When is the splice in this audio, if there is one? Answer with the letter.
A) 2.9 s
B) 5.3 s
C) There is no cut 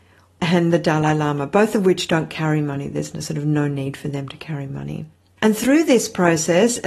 B